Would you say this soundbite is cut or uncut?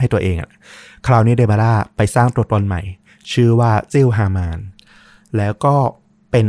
cut